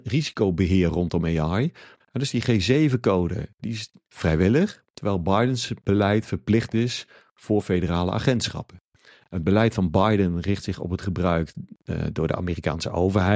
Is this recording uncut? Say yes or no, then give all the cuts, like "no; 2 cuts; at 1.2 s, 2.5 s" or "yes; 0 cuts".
no; 1 cut; at 2.0 s